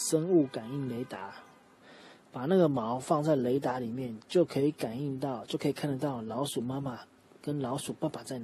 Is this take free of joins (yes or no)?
yes